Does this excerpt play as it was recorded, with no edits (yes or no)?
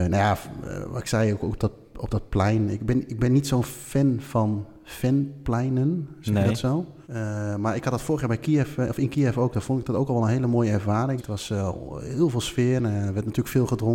no